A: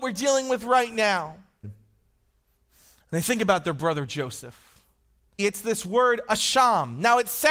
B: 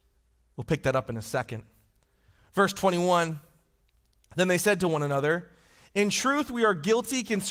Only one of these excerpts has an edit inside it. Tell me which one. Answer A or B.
A